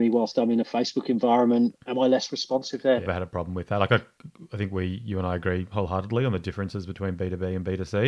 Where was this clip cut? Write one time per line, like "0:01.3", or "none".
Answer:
0:03.1